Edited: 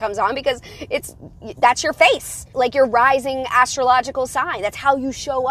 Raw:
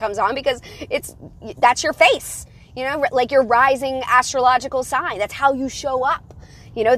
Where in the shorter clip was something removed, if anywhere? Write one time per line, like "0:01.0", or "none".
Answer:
0:02.5